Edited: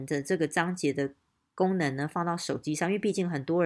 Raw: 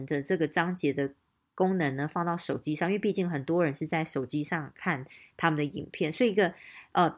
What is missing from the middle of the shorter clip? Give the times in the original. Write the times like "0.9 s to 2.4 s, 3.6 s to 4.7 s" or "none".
none